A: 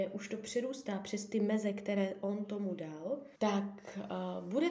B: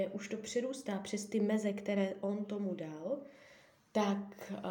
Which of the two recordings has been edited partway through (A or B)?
A